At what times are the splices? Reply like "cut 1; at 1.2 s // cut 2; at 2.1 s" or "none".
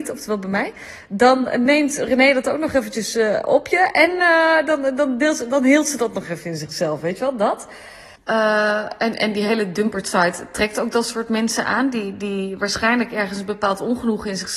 cut 1; at 8.2 s